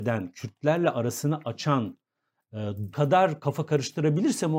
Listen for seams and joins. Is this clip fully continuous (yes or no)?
no